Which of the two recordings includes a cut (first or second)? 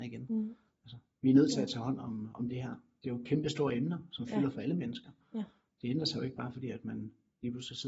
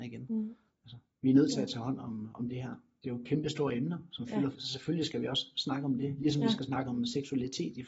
second